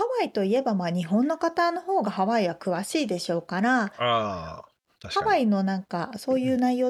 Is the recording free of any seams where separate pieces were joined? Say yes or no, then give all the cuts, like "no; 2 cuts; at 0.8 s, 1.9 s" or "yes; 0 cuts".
yes; 0 cuts